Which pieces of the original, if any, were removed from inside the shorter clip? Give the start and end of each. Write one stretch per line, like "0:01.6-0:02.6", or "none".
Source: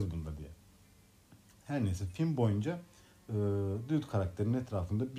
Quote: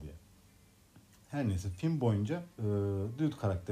0:02.9-0:03.2